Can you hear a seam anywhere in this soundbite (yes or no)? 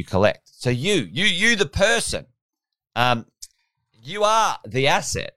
no